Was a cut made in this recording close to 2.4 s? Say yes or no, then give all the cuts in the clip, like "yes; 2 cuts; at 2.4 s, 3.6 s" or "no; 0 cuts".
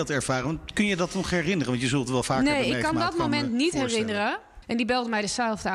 no; 1 cut; at 4.6 s